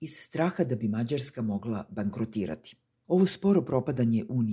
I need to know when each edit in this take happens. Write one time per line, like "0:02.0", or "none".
0:03.0